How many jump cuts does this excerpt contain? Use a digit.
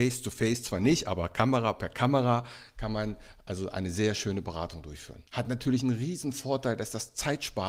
1